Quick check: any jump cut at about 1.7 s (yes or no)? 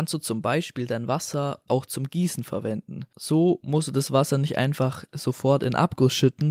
yes